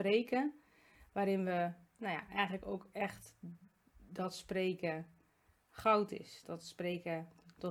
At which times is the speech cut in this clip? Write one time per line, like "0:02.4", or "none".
0:06.4